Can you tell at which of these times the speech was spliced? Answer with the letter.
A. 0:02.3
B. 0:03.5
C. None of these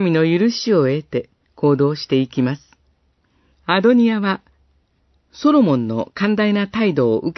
B